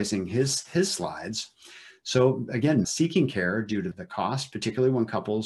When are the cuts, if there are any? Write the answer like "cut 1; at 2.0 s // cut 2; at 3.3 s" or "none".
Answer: cut 1; at 2.8 s // cut 2; at 3.9 s